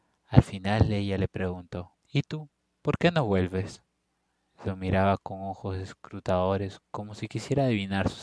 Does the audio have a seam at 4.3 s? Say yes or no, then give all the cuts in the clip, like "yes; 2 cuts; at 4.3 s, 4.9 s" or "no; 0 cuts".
no; 1 cut; at 2.0 s